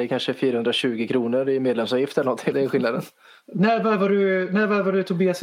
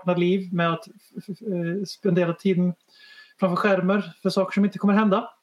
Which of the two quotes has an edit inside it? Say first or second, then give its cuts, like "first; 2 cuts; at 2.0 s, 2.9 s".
first; 1 cut; at 2.5 s